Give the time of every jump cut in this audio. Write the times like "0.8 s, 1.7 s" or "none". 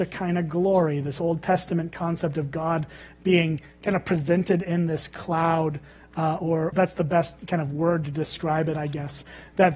6.7 s